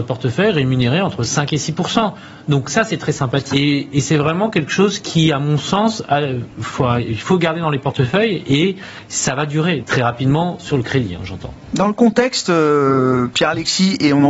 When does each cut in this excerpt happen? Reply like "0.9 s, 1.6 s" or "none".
3.5 s, 9.8 s